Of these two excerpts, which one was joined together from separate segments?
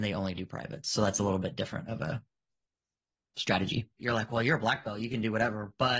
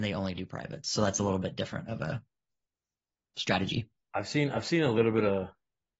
first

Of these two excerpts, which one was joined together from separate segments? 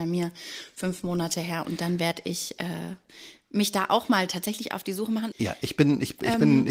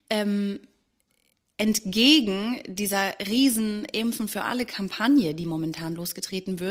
first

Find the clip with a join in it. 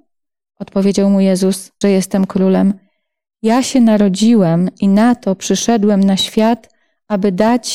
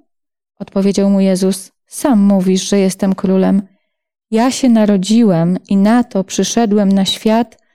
first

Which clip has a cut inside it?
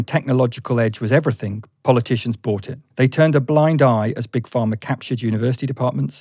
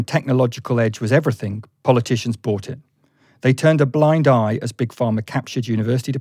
first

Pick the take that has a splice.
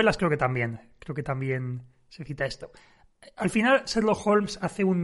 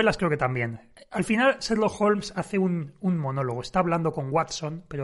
second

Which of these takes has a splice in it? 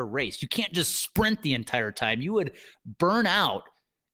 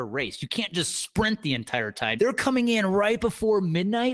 second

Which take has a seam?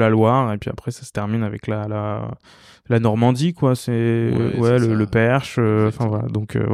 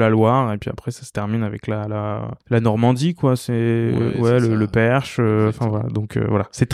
second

